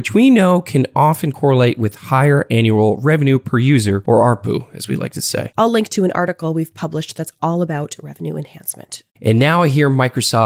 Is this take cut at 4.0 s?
no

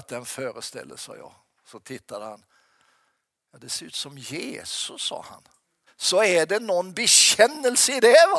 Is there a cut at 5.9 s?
yes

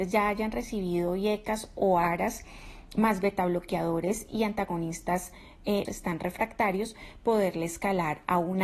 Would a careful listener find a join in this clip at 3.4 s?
no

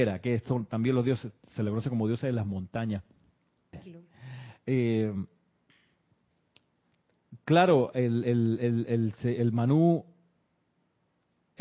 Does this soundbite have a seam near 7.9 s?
no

